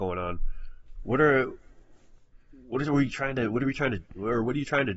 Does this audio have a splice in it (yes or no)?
no